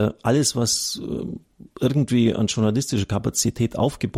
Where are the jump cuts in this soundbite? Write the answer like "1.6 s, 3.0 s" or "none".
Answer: none